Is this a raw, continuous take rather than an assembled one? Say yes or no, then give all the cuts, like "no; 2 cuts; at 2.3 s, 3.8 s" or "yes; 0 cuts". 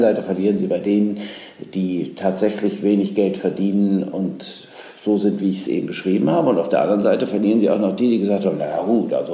yes; 0 cuts